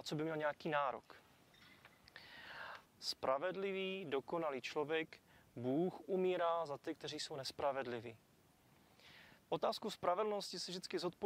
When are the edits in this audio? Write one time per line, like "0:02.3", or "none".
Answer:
0:02.8
0:09.5